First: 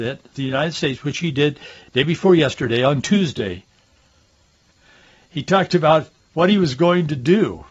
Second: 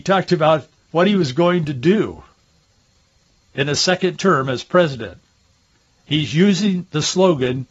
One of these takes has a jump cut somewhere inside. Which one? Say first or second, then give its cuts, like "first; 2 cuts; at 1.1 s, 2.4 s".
first; 1 cut; at 4.7 s